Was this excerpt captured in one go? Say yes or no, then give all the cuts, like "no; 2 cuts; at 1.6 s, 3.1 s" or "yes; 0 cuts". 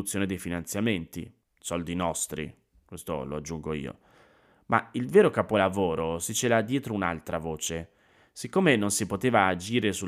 no; 1 cut; at 1.4 s